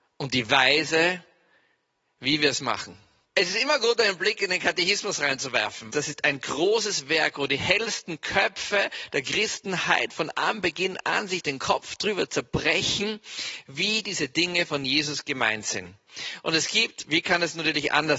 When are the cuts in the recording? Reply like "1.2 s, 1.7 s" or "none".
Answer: 3.2 s, 5.9 s